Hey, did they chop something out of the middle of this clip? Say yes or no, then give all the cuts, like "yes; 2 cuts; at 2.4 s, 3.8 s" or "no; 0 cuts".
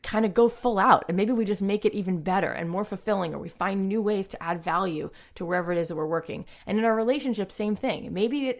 no; 0 cuts